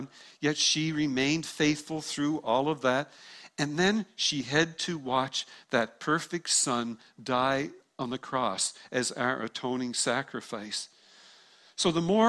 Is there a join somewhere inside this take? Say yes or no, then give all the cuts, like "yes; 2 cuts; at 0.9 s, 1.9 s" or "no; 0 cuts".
no; 0 cuts